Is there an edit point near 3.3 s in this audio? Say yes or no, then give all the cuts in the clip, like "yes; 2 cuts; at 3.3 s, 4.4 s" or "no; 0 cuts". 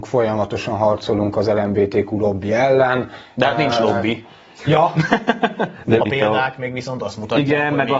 no; 1 cut; at 6.0 s